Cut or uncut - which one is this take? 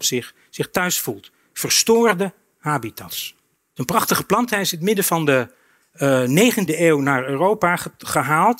cut